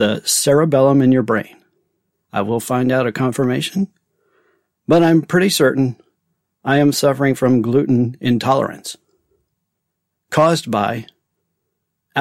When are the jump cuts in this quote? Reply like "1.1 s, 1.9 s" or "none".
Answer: 2.1 s